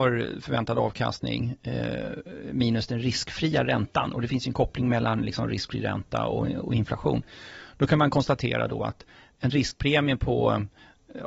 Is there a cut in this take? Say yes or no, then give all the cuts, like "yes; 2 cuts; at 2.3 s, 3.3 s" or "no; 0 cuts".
no; 0 cuts